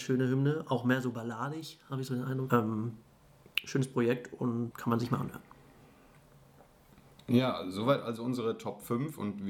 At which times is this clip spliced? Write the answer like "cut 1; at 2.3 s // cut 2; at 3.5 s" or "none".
cut 1; at 2.5 s // cut 2; at 4.7 s